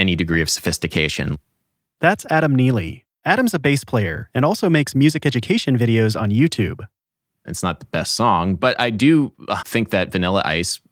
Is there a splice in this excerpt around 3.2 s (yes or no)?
no